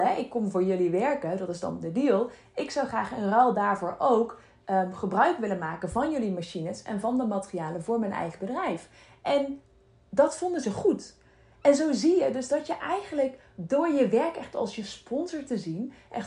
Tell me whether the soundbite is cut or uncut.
uncut